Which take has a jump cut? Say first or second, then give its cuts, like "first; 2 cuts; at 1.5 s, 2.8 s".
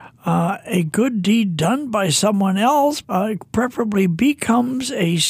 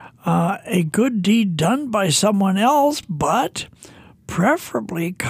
first; 1 cut; at 3.0 s